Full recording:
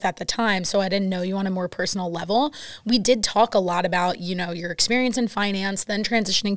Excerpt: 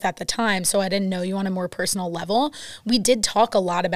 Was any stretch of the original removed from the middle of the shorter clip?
no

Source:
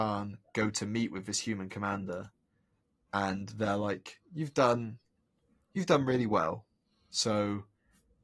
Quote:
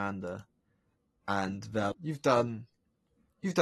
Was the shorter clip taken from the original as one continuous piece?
no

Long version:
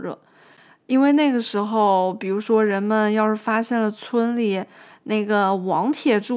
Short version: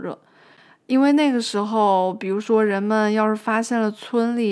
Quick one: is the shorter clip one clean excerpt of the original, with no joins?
yes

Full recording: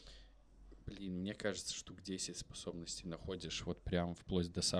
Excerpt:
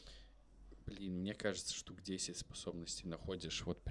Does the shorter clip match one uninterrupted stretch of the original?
yes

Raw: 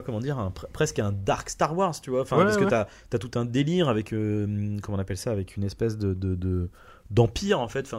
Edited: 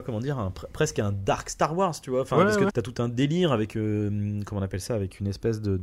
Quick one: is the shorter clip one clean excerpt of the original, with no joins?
no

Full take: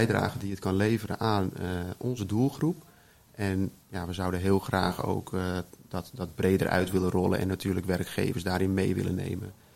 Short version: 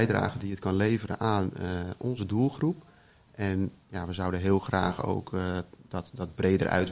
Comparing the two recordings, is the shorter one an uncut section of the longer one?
yes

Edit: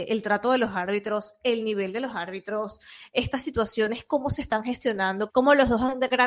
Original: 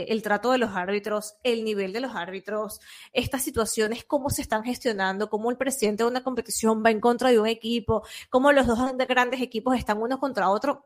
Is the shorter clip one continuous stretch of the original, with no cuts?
no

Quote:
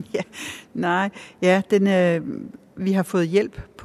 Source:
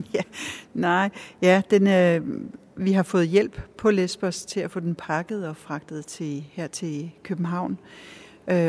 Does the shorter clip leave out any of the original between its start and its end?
no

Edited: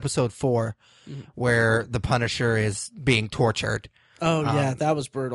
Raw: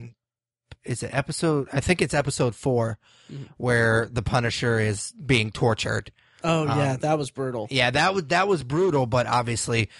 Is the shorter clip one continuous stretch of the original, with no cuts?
yes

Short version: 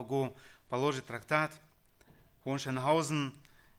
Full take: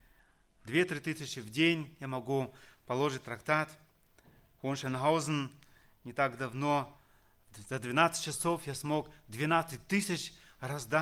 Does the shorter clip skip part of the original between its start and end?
no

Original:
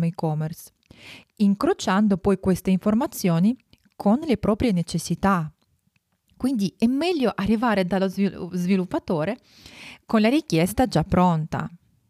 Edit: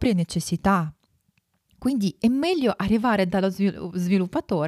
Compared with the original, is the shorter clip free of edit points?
yes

